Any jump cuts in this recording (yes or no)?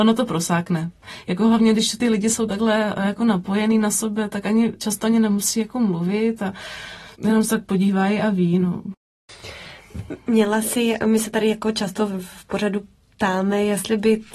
yes